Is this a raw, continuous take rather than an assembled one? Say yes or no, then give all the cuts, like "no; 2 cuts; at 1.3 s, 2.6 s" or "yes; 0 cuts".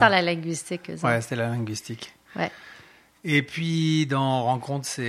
yes; 0 cuts